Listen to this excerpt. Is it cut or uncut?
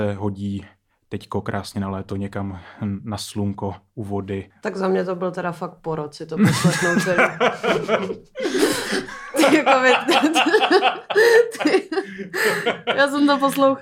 uncut